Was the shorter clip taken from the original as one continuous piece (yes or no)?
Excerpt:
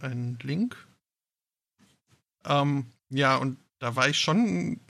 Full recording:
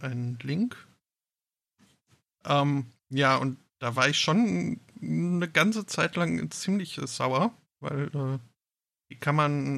yes